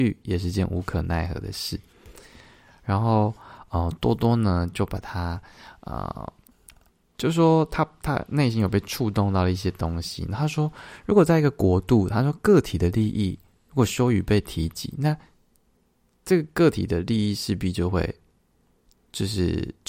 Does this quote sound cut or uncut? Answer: uncut